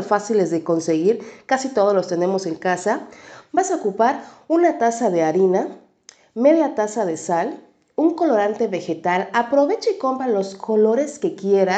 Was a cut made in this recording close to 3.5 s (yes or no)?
yes